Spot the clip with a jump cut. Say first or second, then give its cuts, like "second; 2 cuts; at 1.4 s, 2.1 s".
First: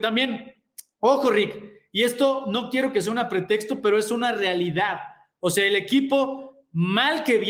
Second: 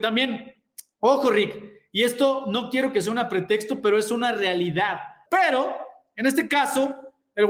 second; 1 cut; at 5.3 s